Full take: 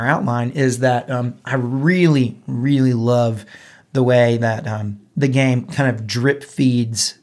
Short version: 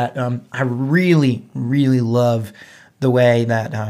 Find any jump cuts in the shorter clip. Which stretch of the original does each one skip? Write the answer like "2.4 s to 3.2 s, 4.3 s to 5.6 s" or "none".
none